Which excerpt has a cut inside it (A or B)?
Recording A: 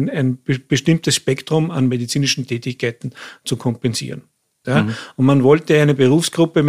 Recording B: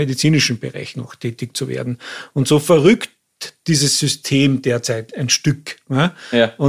A